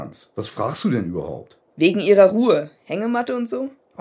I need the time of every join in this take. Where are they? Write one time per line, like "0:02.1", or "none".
0:01.7